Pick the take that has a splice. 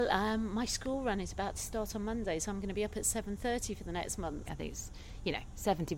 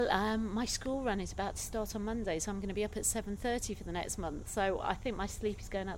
first; 1 cut; at 4.5 s

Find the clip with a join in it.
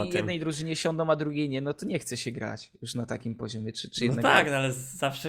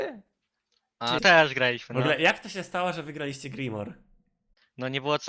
second; 1 cut; at 1.2 s

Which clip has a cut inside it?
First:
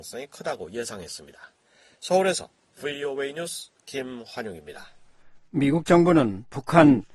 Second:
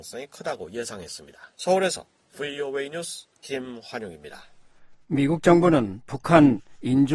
second; 1 cut; at 1.5 s

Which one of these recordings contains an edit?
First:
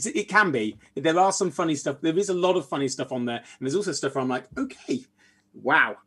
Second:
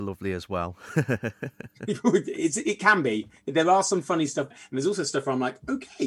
second; 1 cut; at 4.5 s

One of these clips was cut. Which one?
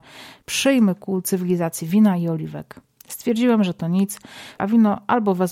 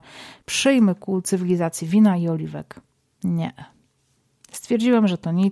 first; 2 cuts; at 2.9 s, 4.6 s

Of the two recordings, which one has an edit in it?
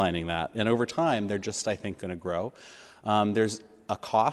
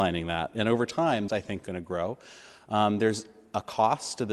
second; 1 cut; at 1.3 s

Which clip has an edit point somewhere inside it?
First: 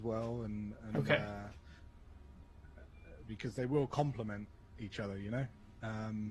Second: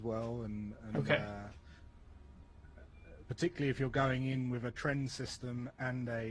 second; 1 cut; at 3.2 s

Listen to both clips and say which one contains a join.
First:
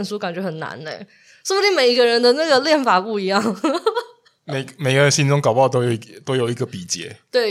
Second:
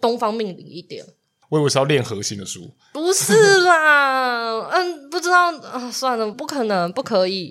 second; 2 cuts; at 1.4 s, 6.3 s

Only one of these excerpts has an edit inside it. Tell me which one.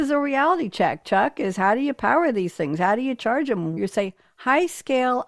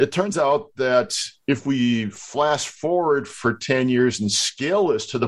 first; 1 cut; at 3.8 s

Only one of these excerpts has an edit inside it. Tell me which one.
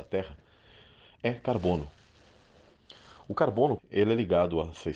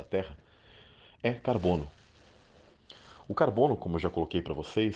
first; 1 cut; at 3.8 s

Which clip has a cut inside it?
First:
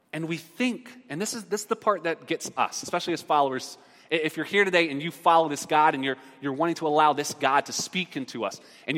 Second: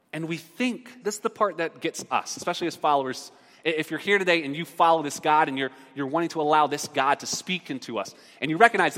second; 1 cut; at 1.0 s

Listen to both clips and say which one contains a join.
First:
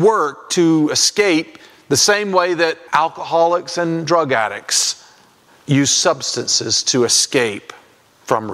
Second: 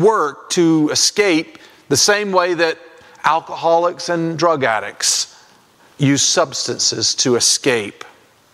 first; 1 cut; at 2.9 s

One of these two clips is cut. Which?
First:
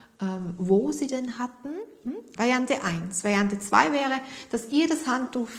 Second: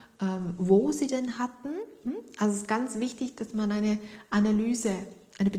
first; 1 cut; at 2.4 s

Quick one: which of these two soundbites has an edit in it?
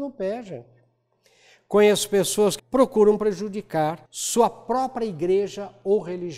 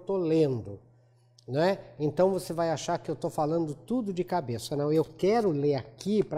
first; 2 cuts; at 2.6 s, 4.1 s

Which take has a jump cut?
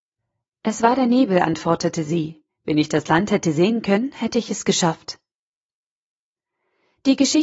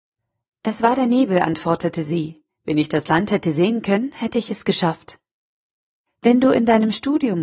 second; 1 cut; at 6.1 s

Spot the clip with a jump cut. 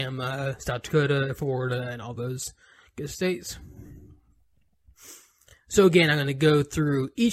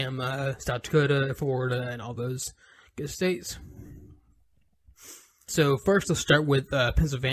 second; 1 cut; at 5.5 s

